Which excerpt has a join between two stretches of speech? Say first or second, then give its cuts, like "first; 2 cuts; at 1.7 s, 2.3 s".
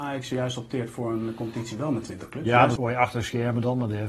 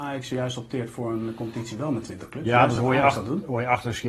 first; 1 cut; at 2.8 s